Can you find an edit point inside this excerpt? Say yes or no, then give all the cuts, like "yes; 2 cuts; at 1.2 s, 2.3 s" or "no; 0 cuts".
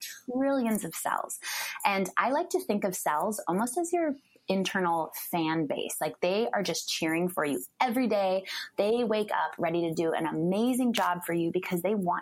no; 0 cuts